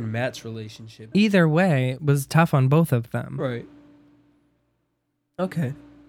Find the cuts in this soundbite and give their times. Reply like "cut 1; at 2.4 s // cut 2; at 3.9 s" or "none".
cut 1; at 1.1 s